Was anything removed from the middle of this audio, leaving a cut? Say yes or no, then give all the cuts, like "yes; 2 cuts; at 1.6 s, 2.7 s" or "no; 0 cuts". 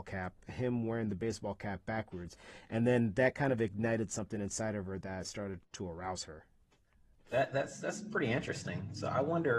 no; 0 cuts